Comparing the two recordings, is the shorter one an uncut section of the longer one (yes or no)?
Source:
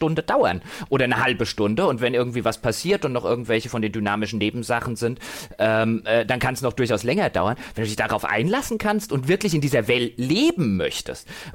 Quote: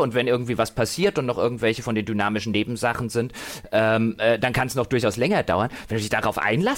yes